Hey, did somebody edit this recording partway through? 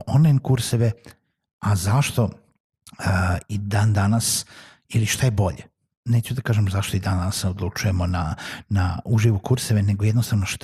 no; 0 cuts

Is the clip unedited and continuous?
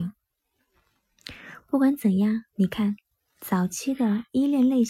yes; 0 cuts

